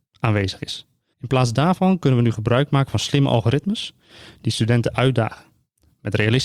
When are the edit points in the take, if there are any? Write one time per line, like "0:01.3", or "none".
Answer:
0:01.1